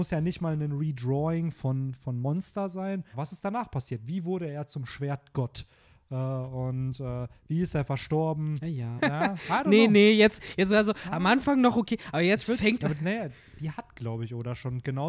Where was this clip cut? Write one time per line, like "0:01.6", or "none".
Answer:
0:03.1
0:09.0
0:12.8